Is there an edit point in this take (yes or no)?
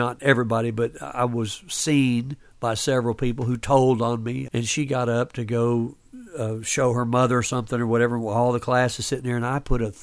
yes